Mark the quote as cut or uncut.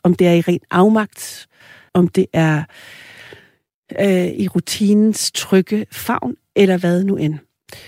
cut